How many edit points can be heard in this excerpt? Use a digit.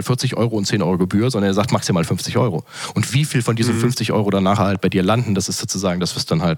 0